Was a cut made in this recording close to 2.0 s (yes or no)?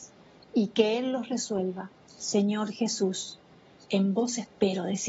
yes